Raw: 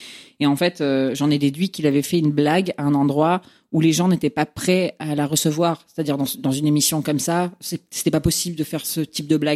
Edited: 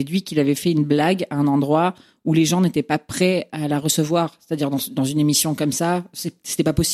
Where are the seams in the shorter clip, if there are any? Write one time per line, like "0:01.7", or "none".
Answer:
none